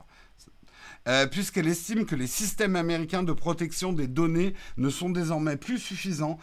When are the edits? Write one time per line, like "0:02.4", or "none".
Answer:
none